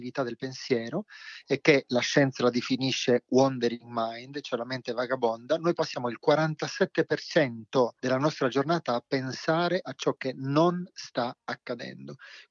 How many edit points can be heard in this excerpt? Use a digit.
1